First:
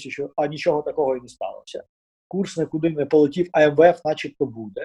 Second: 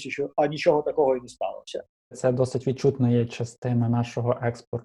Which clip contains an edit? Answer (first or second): second